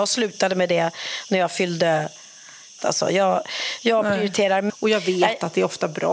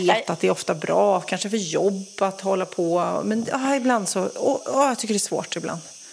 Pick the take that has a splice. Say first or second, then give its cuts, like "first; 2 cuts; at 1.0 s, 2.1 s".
first; 2 cuts; at 2.8 s, 4.7 s